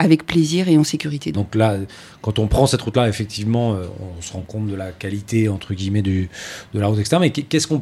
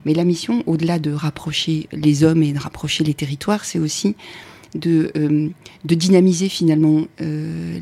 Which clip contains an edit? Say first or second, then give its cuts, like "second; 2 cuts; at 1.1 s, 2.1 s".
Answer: first; 1 cut; at 1.3 s